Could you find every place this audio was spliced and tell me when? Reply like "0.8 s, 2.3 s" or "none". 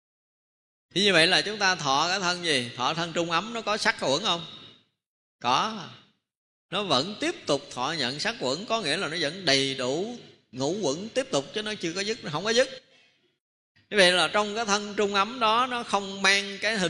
none